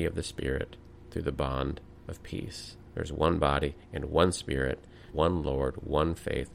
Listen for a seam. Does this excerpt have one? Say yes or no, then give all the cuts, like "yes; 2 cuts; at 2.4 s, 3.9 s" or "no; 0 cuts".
yes; 1 cut; at 5.1 s